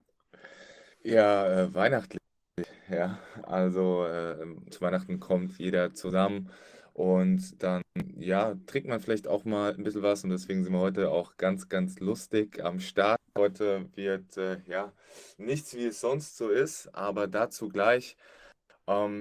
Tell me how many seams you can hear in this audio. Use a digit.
1